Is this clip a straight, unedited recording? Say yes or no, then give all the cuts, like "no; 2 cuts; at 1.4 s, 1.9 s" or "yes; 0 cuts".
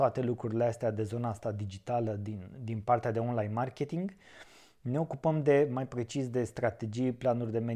yes; 0 cuts